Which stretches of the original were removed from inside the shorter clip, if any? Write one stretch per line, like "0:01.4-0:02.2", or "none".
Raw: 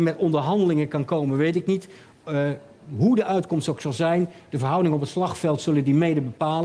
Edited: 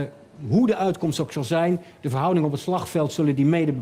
none

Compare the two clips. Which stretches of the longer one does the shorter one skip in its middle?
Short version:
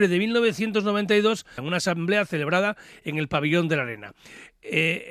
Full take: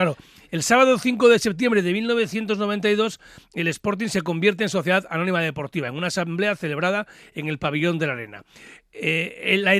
0:03.3-0:05.9

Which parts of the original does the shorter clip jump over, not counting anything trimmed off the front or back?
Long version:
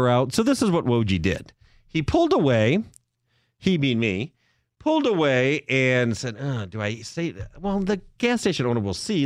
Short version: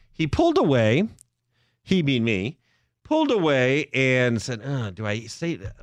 none

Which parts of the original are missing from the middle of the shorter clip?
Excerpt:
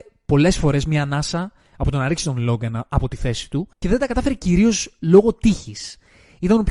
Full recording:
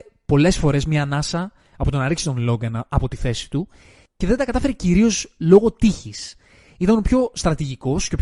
0:03.7-0:04.1

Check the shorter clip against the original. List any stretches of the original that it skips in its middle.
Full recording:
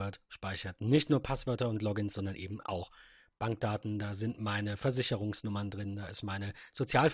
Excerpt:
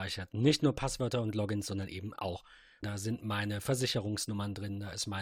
0:03.3-0:04.0

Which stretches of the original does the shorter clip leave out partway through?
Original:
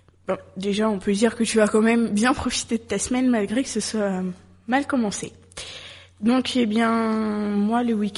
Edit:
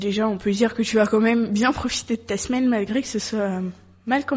none

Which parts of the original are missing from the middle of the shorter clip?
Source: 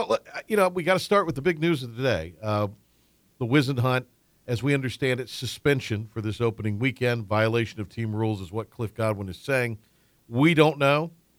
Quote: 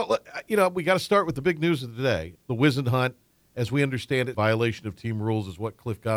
0:02.4-0:03.3
0:05.3-0:07.3

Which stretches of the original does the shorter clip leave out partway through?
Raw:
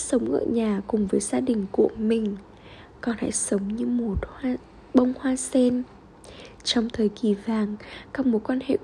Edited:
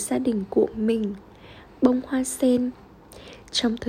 0:02.9-0:04.8

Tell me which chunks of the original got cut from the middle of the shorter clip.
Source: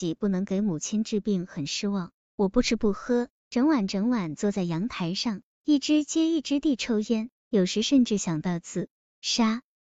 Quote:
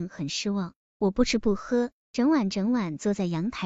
none

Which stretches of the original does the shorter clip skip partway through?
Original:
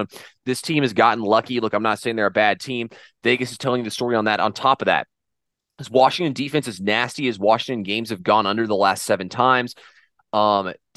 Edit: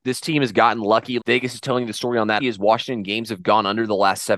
0:01.6-0:03.2
0:04.4-0:07.2

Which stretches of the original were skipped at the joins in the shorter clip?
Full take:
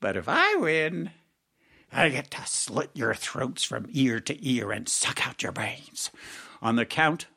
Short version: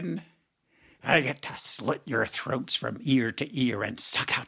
none

